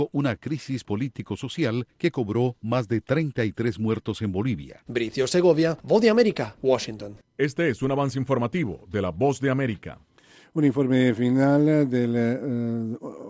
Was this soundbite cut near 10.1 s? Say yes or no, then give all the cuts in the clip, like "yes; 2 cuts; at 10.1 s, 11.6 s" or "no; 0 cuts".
no; 1 cut; at 4.9 s